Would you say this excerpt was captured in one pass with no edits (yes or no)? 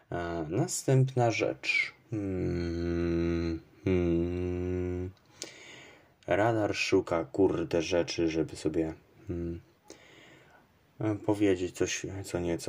yes